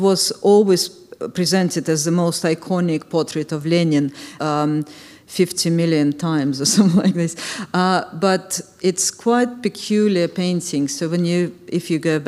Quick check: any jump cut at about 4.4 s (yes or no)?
yes